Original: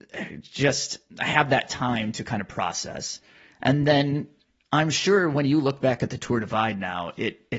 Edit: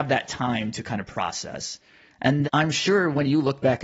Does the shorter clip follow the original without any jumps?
no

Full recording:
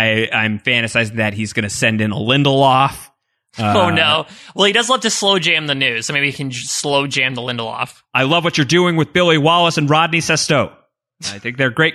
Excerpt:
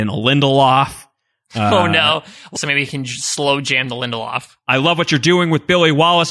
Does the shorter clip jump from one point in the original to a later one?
yes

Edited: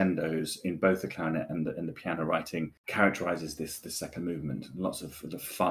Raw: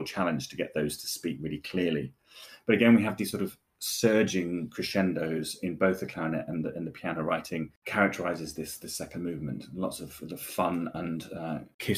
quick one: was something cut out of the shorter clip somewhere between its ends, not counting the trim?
no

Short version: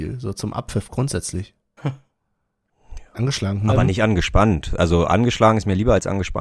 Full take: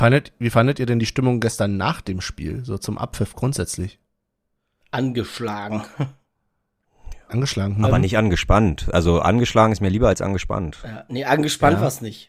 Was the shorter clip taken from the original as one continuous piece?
no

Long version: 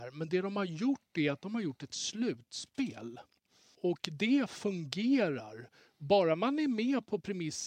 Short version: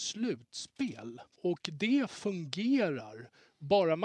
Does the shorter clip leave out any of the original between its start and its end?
yes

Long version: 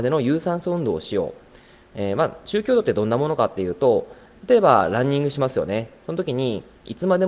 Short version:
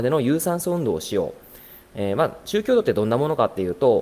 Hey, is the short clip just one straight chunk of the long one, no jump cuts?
yes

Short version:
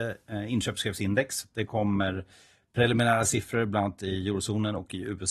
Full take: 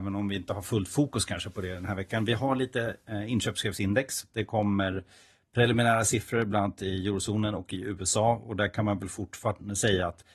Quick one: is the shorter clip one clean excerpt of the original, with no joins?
yes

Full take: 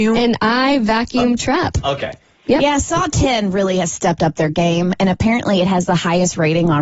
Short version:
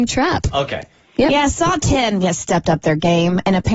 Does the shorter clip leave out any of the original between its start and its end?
yes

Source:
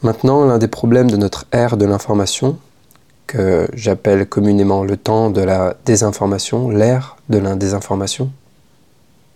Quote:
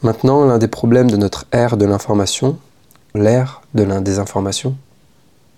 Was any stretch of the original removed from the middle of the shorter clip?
yes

